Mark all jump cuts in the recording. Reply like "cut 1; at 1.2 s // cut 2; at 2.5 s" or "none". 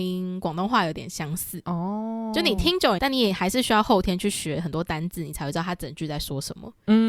cut 1; at 3.0 s